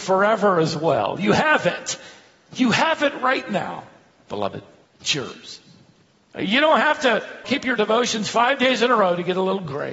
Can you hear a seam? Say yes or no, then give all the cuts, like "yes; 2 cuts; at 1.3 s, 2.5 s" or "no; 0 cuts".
yes; 1 cut; at 7.4 s